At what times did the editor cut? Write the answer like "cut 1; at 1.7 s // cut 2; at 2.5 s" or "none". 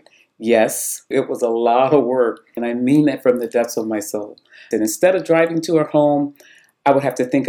cut 1; at 1.1 s // cut 2; at 2.6 s // cut 3; at 4.7 s